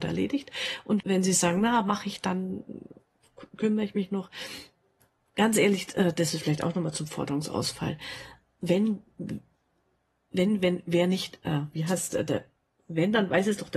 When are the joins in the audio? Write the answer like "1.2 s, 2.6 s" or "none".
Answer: 1.0 s